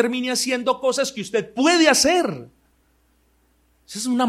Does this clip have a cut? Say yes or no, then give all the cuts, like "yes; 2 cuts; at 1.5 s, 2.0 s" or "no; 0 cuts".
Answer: no; 0 cuts